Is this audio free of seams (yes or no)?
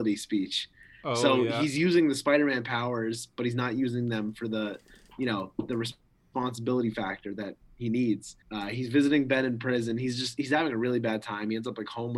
no